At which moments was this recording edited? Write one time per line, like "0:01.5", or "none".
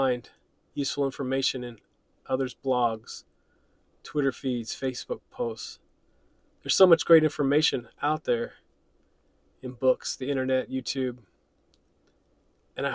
none